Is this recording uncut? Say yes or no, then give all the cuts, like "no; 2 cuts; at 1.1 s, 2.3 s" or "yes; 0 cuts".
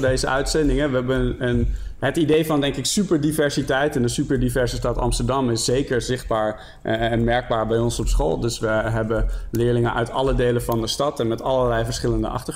yes; 0 cuts